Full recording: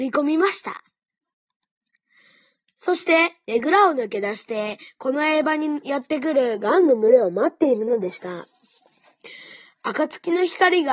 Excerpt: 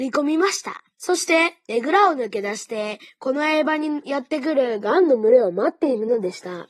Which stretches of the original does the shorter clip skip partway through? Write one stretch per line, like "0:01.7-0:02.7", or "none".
0:00.9-0:02.7

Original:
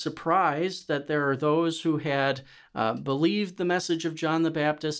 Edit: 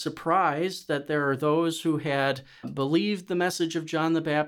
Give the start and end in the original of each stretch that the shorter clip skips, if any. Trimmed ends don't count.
0:02.6-0:02.9

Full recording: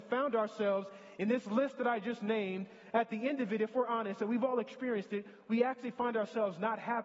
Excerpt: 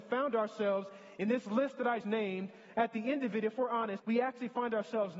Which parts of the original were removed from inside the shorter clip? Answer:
0:02.0-0:02.2
0:04.2-0:05.4

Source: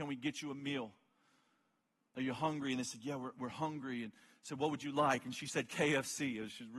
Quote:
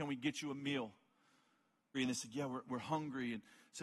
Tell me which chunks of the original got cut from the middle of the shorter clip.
0:01.9-0:02.6

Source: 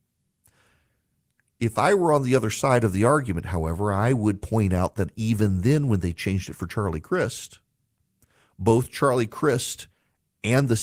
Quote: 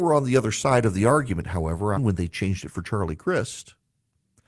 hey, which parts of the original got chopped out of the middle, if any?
0:03.9-0:05.8

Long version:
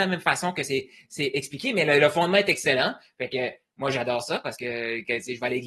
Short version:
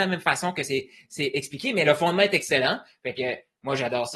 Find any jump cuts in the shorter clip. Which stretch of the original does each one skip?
0:01.9-0:02.0

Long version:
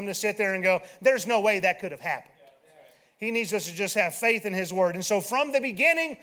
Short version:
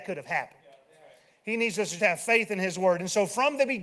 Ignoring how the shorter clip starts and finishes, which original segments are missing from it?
0:03.7-0:03.9

